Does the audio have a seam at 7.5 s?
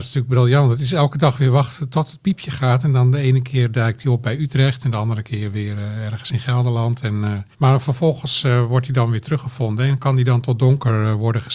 yes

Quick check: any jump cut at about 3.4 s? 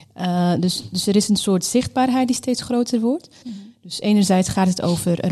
yes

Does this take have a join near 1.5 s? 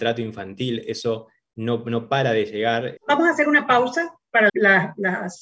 no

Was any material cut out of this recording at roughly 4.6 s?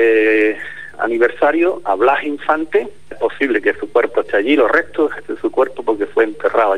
no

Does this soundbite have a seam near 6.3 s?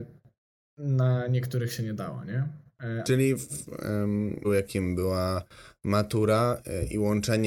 no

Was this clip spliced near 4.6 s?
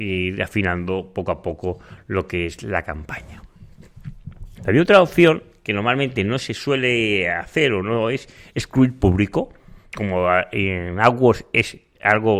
yes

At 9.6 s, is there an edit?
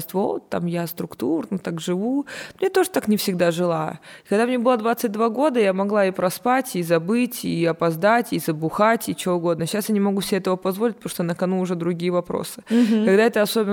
no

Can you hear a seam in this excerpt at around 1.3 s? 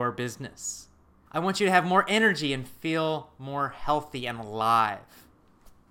yes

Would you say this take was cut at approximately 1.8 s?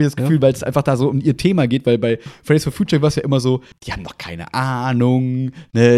no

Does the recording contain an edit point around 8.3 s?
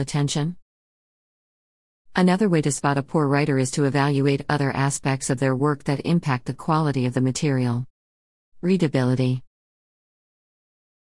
no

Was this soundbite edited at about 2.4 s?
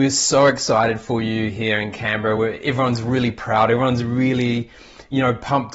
no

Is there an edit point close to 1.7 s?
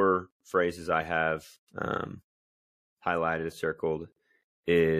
yes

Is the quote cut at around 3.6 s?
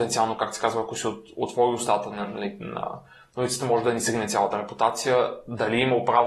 no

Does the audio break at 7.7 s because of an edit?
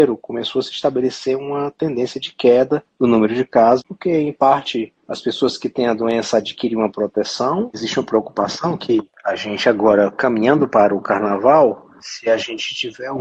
no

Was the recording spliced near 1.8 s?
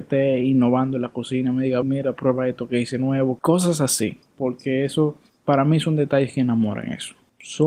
yes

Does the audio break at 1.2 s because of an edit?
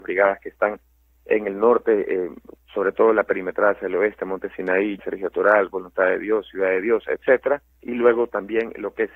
no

